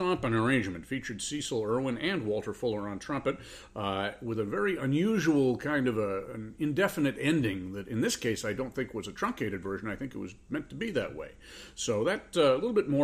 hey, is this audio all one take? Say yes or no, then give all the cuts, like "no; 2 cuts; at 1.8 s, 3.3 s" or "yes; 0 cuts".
no; 1 cut; at 6.3 s